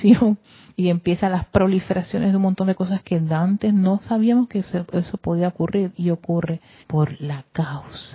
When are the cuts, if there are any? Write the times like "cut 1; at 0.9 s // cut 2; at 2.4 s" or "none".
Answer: cut 1; at 6.8 s